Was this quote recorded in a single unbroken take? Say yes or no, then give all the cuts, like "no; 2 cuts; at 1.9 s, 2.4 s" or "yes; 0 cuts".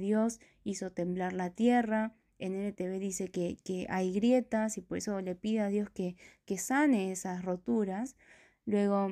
yes; 0 cuts